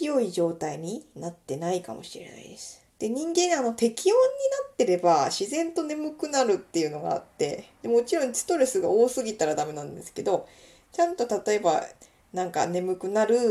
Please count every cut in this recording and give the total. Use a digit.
1